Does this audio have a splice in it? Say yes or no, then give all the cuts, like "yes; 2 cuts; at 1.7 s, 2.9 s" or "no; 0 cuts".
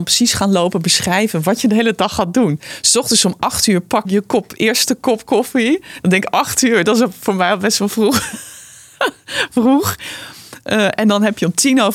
yes; 1 cut; at 4.0 s